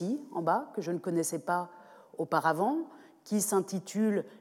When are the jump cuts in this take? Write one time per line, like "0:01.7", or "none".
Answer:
none